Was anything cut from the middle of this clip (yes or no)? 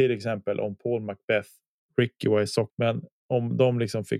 yes